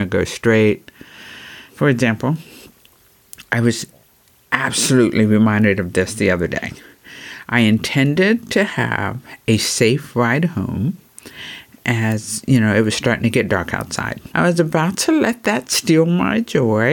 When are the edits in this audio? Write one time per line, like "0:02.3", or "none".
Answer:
0:01.7
0:14.3